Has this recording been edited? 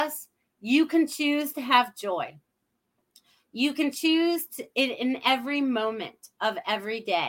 no; 0 cuts

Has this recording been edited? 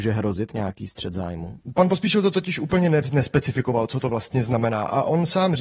no; 0 cuts

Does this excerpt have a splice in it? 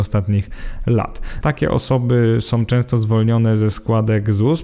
yes; 1 cut; at 1.4 s

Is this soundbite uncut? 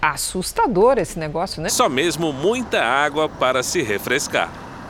no; 1 cut; at 1.7 s

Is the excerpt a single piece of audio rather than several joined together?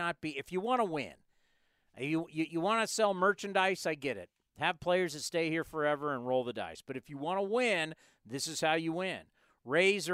yes; 0 cuts

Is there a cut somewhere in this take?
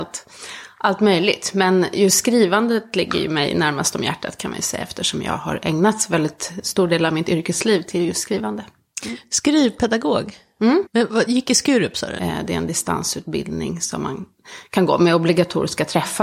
yes; 2 cuts; at 10.9 s, 12.2 s

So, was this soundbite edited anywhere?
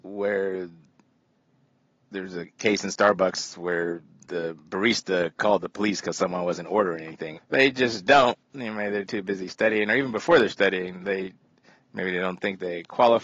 yes; 1 cut; at 7.4 s

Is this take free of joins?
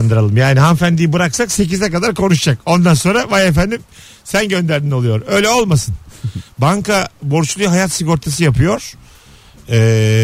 yes; 0 cuts

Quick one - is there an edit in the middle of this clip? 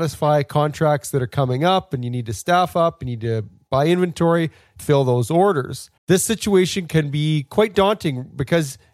yes; 2 cuts; at 4.8 s, 6.0 s

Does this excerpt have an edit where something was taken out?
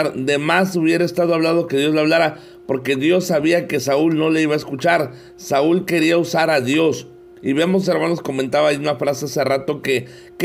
yes; 1 cut; at 7.4 s

